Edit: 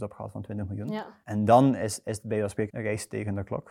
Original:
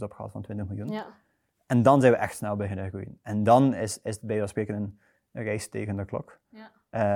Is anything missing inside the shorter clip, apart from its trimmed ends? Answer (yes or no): yes